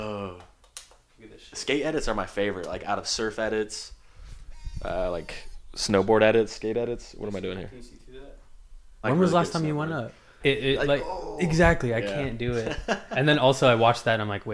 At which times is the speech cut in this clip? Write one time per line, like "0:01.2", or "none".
0:09.0
0:10.4